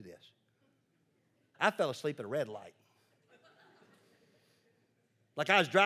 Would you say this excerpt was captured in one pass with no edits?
no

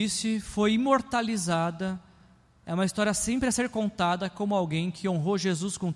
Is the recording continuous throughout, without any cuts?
yes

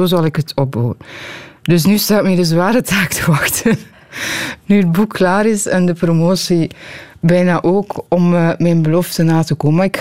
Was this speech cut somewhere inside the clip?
no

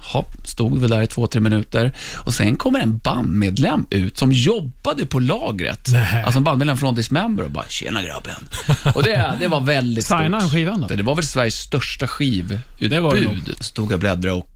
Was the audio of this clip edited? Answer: yes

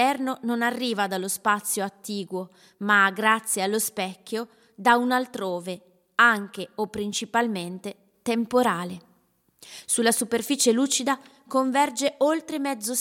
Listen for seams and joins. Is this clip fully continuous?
yes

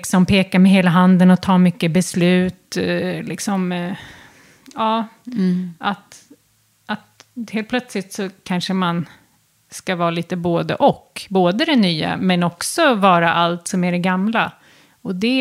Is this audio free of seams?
yes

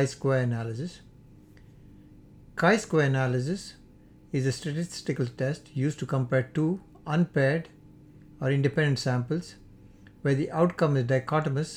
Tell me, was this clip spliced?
no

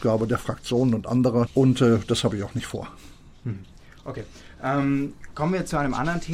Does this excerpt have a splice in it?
yes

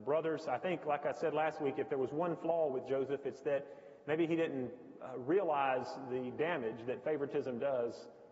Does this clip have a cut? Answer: no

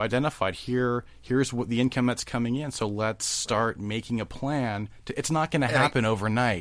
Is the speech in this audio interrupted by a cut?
no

